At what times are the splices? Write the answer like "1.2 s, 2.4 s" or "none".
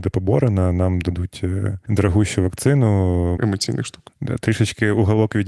3.4 s